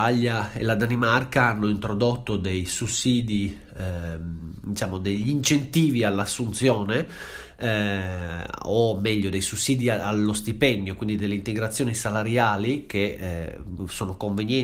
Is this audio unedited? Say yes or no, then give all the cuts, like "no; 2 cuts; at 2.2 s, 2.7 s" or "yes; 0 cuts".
yes; 0 cuts